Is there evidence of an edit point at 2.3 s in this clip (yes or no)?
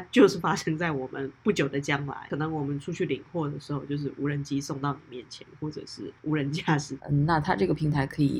no